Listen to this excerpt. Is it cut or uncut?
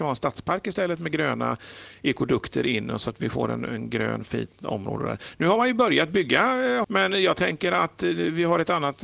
cut